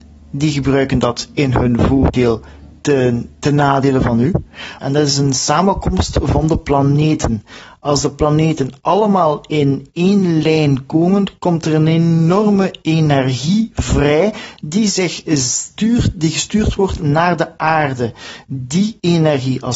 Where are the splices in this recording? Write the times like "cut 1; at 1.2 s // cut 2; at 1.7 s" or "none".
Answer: cut 1; at 4.8 s